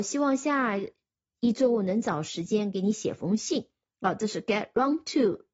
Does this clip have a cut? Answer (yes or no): no